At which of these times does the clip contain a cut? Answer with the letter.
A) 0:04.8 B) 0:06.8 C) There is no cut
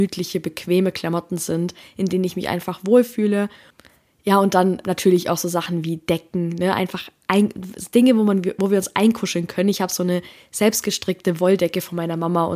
A